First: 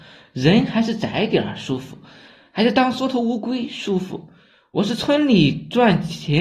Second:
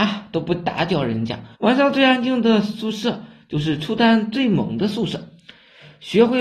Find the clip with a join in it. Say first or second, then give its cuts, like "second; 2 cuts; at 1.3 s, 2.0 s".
second; 1 cut; at 1.5 s